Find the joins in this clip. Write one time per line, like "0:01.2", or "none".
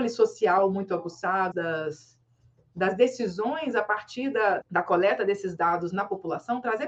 0:01.5
0:04.6